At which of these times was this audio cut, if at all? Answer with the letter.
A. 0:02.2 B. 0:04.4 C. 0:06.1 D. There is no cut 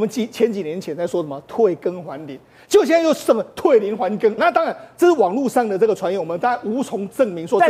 B